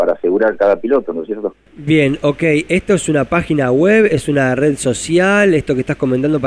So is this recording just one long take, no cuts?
yes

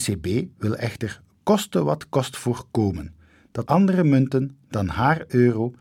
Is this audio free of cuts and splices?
no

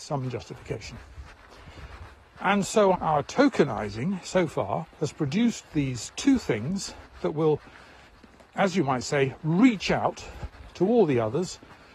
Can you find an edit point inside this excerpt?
yes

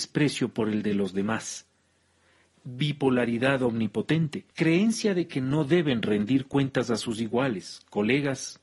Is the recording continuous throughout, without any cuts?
no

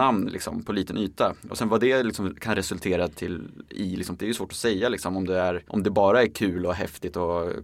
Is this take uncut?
no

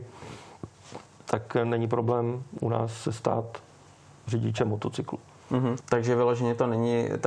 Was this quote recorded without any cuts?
no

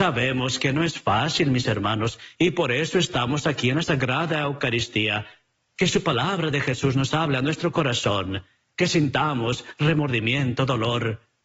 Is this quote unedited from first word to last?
yes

